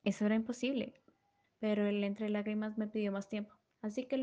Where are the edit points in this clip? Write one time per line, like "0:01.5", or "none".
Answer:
0:01.4